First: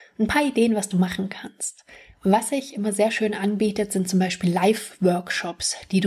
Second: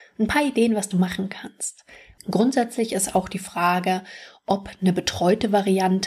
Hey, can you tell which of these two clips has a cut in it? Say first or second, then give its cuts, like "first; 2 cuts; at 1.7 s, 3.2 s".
second; 1 cut; at 2.2 s